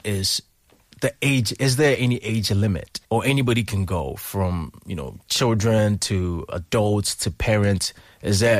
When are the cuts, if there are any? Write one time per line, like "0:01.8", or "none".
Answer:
0:03.0